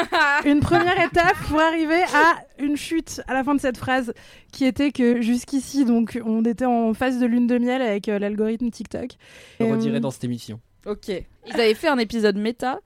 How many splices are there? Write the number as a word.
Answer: two